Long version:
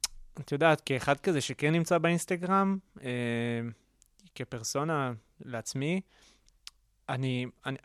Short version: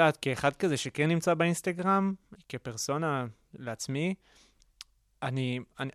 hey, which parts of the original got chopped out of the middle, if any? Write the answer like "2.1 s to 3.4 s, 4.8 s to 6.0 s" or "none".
3.0 s to 4.2 s